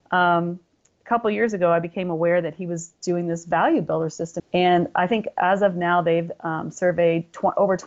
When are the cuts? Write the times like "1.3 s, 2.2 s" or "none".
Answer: 4.4 s